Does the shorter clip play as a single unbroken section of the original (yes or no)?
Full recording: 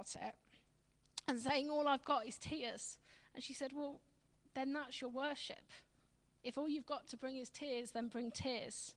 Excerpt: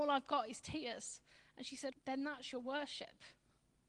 no